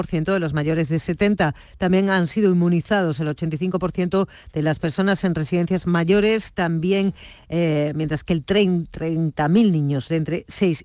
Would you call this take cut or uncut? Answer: uncut